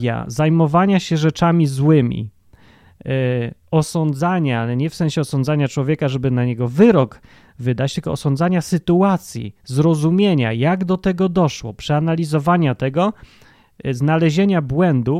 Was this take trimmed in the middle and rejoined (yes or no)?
no